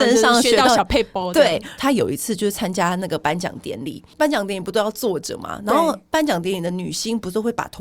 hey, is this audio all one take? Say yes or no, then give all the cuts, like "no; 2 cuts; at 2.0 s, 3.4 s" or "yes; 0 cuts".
no; 1 cut; at 1.8 s